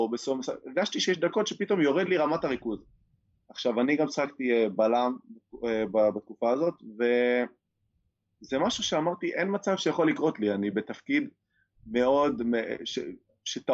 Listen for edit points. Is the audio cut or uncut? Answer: uncut